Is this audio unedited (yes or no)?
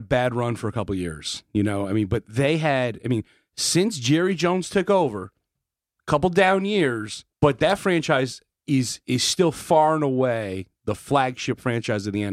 no